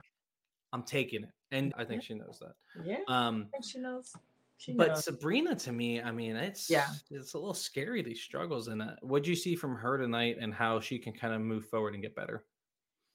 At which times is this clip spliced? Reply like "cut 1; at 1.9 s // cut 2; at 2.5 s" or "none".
cut 1; at 1.7 s